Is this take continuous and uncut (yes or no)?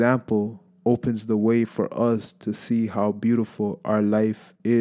yes